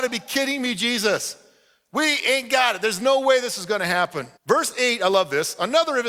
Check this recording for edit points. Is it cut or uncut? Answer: cut